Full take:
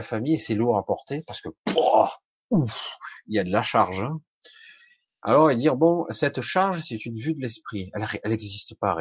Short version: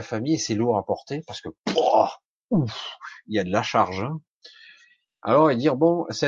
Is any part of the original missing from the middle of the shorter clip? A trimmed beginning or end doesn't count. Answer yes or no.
no